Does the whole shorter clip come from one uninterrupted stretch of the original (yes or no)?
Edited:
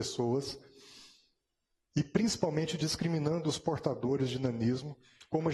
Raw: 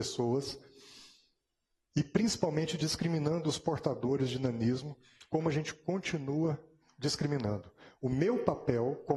yes